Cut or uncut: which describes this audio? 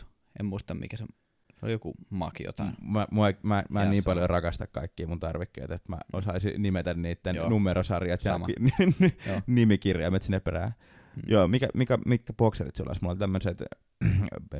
uncut